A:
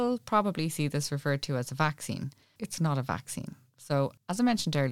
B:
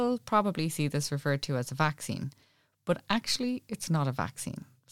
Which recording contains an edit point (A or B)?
A